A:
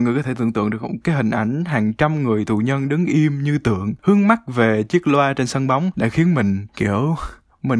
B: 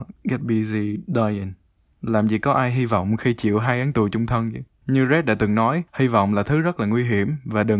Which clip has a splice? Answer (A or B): B